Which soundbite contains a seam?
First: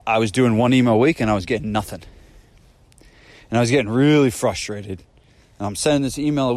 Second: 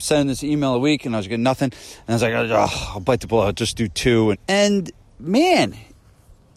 second; 1 cut; at 4.3 s

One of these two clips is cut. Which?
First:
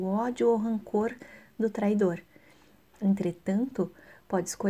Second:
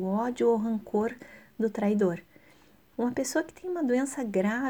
second; 1 cut; at 2.9 s

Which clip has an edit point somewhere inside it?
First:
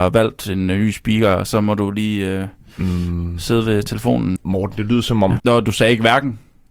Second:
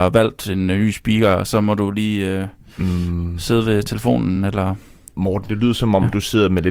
first; 2 cuts; at 4.4 s, 5.4 s

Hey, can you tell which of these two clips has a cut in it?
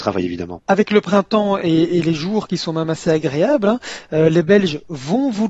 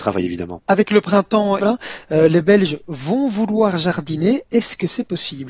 second; 1 cut; at 1.6 s

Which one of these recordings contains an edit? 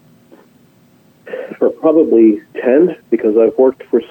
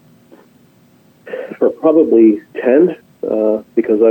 first; 1 cut; at 3.0 s

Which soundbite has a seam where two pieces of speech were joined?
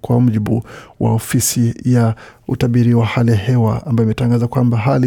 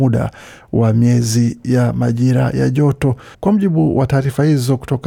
second; 1 cut; at 3.3 s

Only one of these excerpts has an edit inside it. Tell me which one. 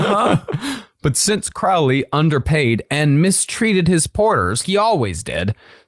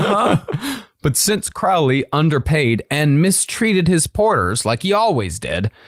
first; 1 cut; at 4.6 s

